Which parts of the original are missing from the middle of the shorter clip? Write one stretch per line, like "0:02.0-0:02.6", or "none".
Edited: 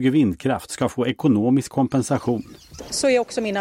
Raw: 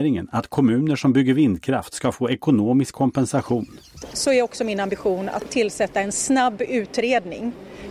none

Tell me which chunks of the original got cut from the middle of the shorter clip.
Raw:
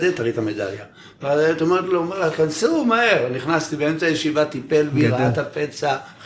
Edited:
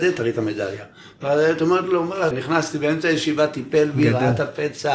0:02.3-0:03.3

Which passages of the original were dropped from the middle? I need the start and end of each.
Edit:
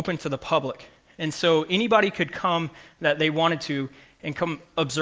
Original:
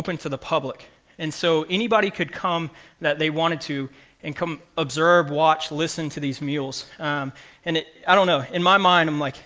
none

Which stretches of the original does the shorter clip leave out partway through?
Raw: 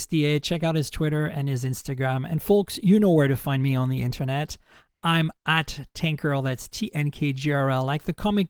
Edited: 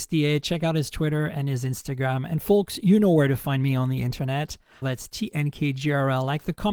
0:04.8-0:06.4

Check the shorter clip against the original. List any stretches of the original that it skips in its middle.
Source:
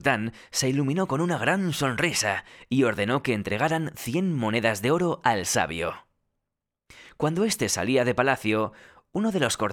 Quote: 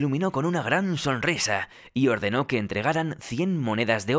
none

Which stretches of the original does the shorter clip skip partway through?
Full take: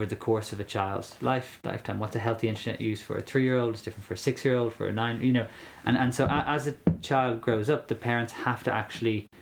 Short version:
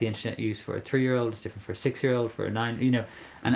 none

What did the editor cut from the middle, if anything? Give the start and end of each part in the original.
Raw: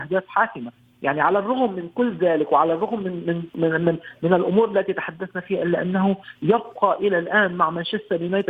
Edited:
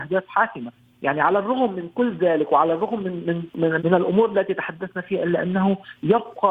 0:03.8-0:04.2

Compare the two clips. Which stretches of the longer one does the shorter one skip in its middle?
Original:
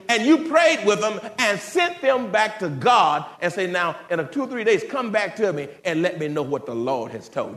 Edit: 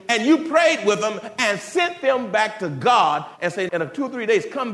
0:03.7-0:04.1

